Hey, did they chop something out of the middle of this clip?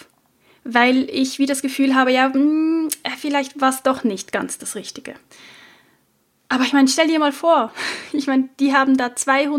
no; 0 cuts

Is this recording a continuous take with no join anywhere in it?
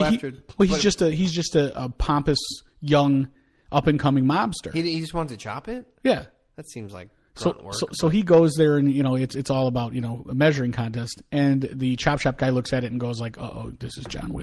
yes; 0 cuts

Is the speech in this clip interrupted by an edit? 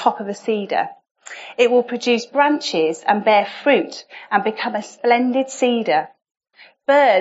no; 0 cuts

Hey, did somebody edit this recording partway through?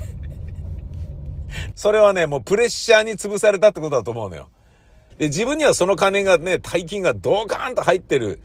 yes; 2 cuts; at 1.7 s, 5.1 s

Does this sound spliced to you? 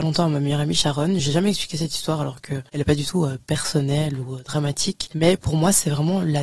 no; 0 cuts

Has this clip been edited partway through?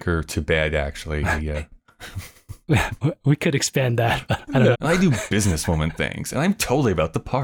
yes; 1 cut; at 4.7 s

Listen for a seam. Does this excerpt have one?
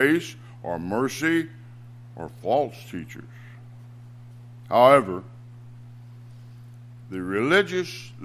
no; 0 cuts

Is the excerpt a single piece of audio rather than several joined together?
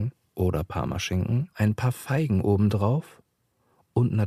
no; 1 cut; at 1.5 s

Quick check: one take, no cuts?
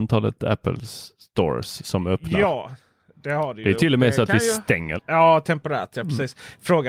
no; 1 cut; at 5.0 s

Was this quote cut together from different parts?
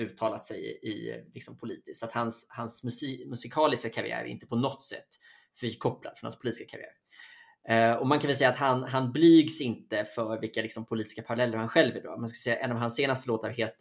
no; 0 cuts

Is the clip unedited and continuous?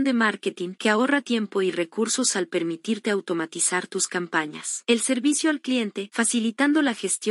yes; 0 cuts

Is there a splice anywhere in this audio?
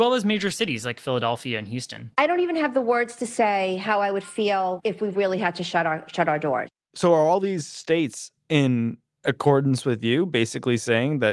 no; 0 cuts

